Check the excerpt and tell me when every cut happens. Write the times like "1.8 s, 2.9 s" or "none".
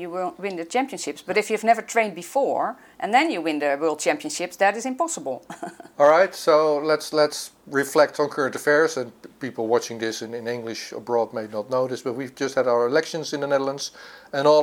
none